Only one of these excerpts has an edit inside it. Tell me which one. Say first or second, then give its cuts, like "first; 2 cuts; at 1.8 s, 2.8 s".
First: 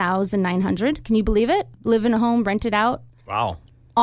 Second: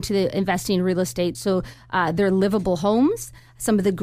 second; 1 cut; at 1.3 s